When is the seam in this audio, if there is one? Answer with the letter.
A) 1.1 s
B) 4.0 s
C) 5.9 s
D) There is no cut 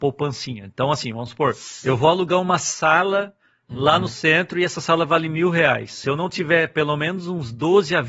D